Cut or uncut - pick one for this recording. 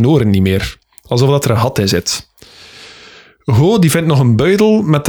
uncut